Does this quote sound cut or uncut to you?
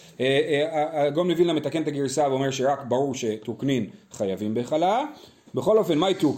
uncut